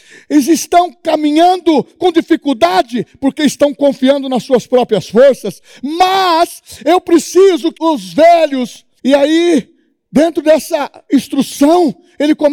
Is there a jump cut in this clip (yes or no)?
yes